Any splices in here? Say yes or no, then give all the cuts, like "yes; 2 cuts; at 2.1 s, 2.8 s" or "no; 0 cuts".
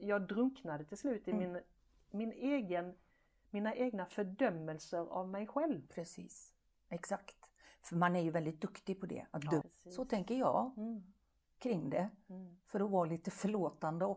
yes; 1 cut; at 9.6 s